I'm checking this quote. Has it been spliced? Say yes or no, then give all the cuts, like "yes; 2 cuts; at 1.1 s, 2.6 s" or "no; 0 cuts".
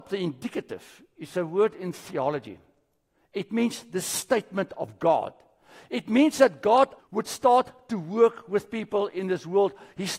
yes; 1 cut; at 7.0 s